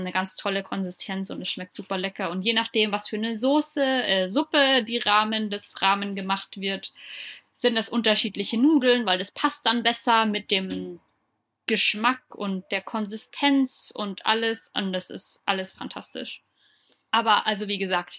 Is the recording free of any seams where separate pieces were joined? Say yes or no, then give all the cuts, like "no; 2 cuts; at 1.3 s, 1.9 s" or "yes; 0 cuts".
yes; 0 cuts